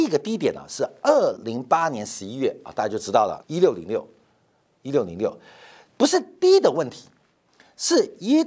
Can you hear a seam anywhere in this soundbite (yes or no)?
yes